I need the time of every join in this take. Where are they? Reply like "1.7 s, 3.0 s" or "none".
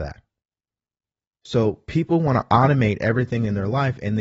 1.4 s